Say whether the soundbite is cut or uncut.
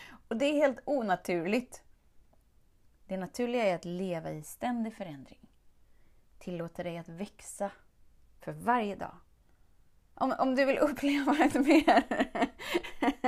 cut